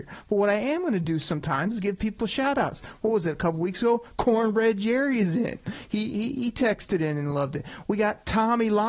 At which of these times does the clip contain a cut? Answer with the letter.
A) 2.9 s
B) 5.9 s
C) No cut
C